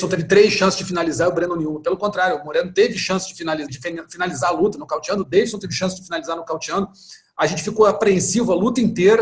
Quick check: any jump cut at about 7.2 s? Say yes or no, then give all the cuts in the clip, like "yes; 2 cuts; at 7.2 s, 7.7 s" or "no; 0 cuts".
no; 1 cut; at 3.7 s